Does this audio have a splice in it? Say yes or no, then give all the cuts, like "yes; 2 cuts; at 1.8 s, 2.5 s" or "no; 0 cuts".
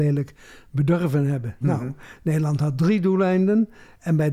yes; 1 cut; at 1.6 s